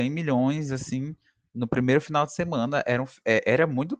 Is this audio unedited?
yes; 0 cuts

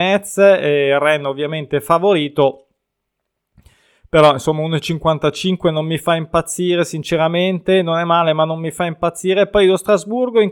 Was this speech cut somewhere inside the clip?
no; 0 cuts

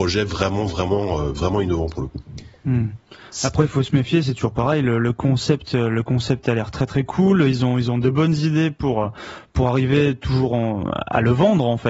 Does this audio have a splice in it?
no; 0 cuts

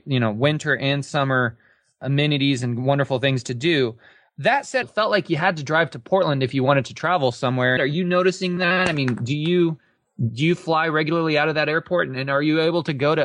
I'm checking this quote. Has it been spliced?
yes; 2 cuts; at 4.8 s, 7.8 s

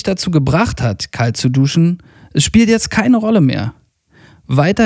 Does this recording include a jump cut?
no; 0 cuts

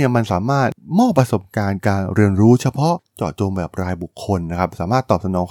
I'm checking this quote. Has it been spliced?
no; 0 cuts

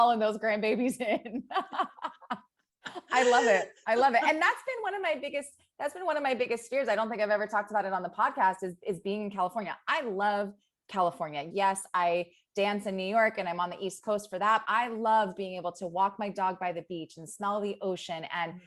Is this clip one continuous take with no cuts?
no; 2 cuts; at 11.5 s, 14.6 s

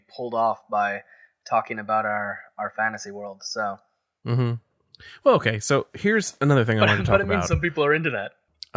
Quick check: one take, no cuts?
yes; 0 cuts

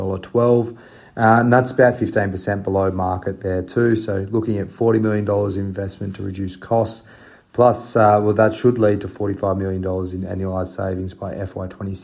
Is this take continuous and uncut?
yes; 0 cuts

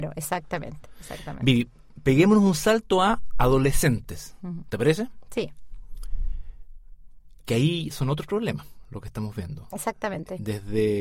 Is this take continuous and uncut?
yes; 0 cuts

